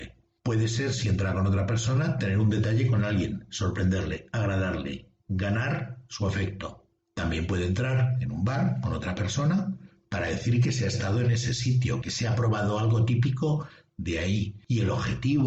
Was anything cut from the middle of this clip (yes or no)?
yes